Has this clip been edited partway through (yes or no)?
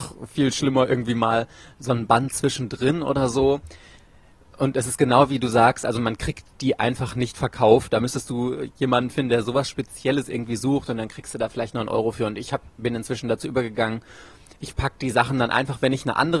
no